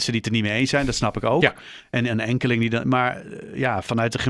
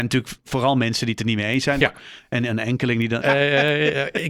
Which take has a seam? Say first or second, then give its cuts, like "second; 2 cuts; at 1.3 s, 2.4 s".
second; 2 cuts; at 1.8 s, 3.2 s